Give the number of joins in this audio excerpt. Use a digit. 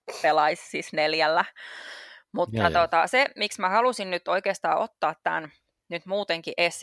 0